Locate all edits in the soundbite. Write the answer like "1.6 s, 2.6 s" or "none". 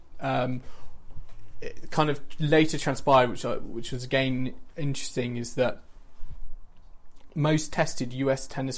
none